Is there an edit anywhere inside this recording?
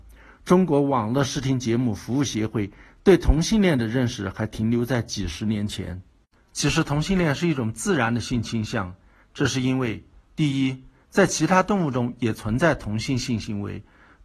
yes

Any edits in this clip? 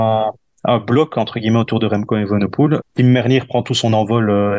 yes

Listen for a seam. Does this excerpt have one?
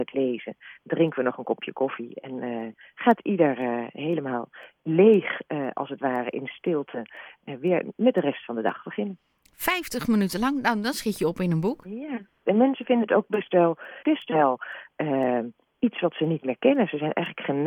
yes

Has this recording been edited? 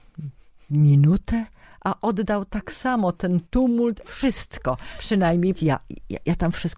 yes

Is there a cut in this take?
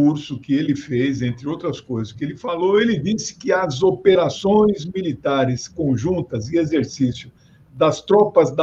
no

